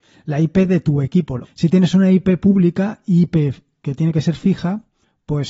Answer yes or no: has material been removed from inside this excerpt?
yes